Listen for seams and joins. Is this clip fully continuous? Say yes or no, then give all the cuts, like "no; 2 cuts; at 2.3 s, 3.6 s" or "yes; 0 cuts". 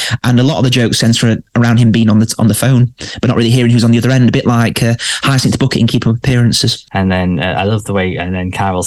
yes; 0 cuts